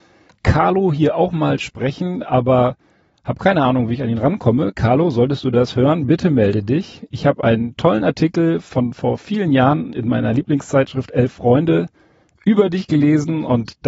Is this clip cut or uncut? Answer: uncut